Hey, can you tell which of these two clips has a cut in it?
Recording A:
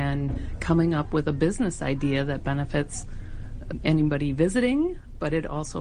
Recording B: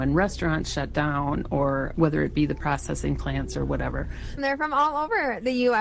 B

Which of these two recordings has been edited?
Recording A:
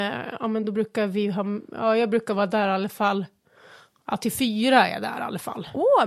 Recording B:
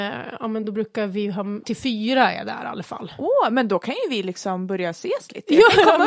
B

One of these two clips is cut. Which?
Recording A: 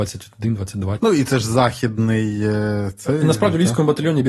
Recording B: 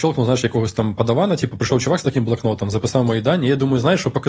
A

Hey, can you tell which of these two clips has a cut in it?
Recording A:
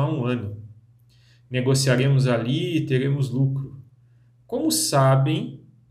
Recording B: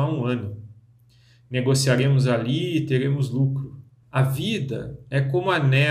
B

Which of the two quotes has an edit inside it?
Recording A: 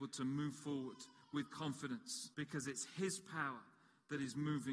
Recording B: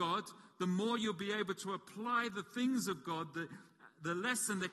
A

